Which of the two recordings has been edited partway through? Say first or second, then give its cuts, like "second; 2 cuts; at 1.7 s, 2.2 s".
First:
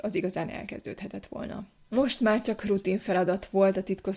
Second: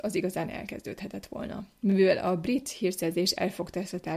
first; 1 cut; at 1.8 s